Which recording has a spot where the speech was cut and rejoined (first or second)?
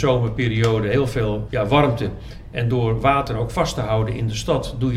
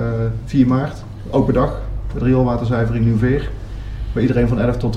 first